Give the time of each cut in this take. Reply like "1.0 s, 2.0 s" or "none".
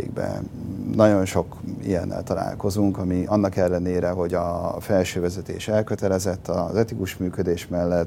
none